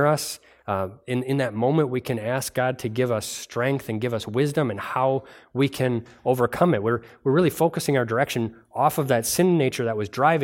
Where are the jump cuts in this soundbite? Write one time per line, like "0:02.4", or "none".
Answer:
none